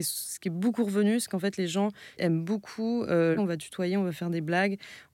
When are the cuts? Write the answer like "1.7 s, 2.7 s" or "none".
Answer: 3.4 s